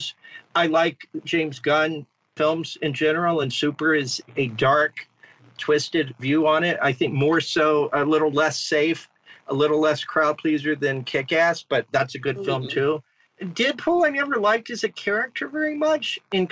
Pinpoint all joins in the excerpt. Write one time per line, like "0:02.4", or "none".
none